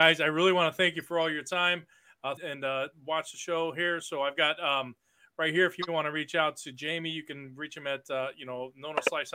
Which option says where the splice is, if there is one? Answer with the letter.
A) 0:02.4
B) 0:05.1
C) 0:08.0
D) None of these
A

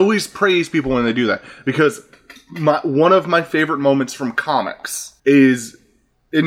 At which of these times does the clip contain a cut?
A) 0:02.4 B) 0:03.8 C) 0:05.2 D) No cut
C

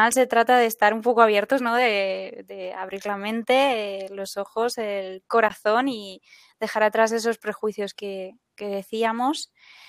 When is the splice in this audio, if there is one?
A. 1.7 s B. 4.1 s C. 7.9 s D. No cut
D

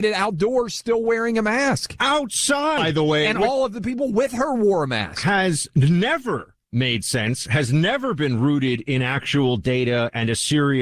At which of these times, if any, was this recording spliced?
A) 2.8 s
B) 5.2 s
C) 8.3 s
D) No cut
A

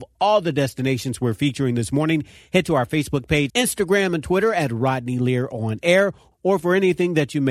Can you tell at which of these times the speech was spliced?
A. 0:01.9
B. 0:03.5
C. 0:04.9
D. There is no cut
B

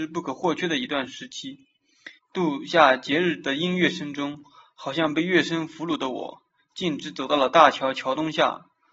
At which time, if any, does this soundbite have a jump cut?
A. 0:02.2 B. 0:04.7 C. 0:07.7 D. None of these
A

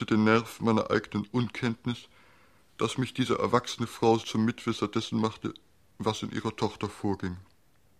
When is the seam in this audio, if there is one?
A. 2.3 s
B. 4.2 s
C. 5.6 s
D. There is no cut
B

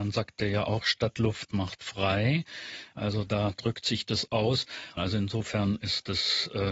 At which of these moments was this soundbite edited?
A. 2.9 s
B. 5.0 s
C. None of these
B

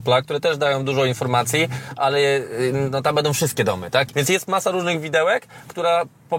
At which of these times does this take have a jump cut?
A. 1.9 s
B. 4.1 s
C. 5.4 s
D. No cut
B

